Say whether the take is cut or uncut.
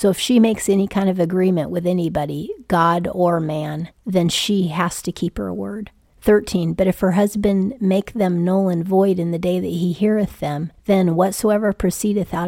cut